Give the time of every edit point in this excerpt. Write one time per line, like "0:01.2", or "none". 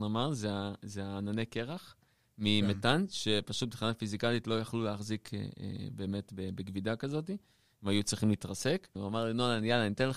0:09.0